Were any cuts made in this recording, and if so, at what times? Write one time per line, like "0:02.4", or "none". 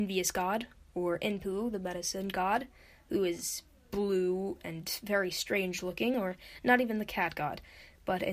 none